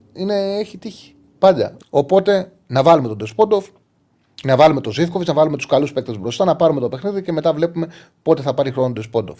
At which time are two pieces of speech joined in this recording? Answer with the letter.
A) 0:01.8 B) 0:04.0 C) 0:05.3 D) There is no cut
A